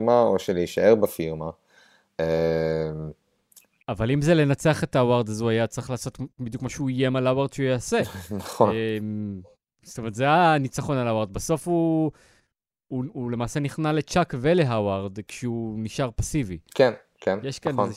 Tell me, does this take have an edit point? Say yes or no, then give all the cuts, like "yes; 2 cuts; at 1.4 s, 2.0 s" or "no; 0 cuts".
no; 0 cuts